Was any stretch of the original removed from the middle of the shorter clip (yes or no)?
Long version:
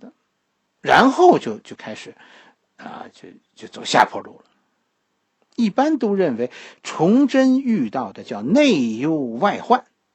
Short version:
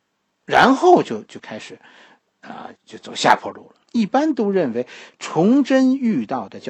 yes